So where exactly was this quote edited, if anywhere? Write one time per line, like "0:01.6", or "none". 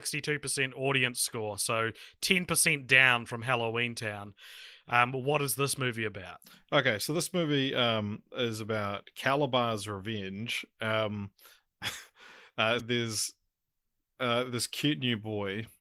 0:12.8